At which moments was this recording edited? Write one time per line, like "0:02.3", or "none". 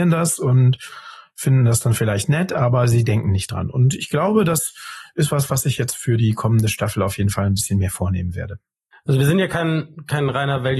none